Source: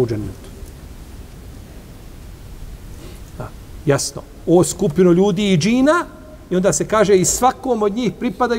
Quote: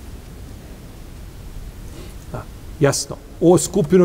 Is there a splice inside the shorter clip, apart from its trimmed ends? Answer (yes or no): no